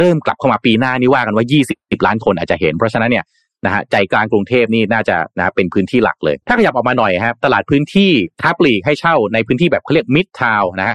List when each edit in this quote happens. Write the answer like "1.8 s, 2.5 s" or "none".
6.4 s, 8.3 s